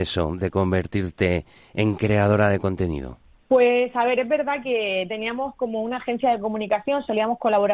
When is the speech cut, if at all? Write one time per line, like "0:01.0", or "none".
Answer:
none